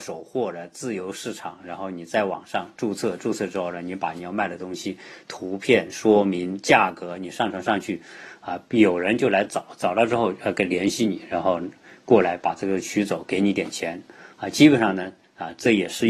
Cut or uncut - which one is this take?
uncut